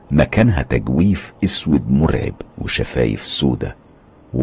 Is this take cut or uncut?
cut